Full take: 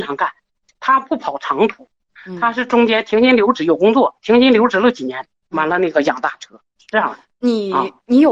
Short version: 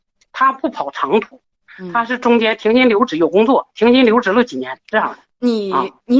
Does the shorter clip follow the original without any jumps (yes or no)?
no